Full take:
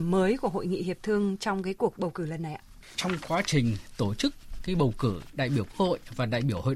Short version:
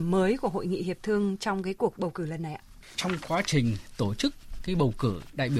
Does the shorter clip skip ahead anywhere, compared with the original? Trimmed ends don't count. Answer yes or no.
no